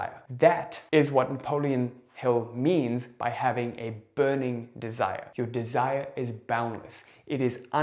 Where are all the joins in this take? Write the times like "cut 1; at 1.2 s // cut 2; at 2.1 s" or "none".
none